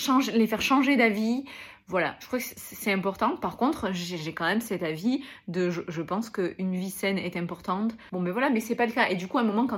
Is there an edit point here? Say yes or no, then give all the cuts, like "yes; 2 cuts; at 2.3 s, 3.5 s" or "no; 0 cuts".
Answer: yes; 1 cut; at 8.1 s